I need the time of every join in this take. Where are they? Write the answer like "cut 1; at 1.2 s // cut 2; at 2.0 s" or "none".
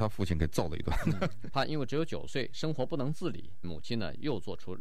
cut 1; at 1.5 s // cut 2; at 3.6 s